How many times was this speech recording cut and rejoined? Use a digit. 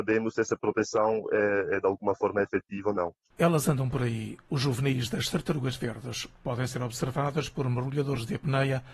1